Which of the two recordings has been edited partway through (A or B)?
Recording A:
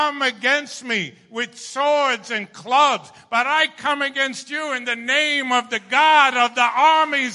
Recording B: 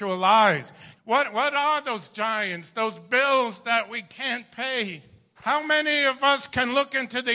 B